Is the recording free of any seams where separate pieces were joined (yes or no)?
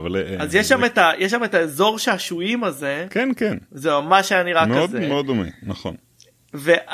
yes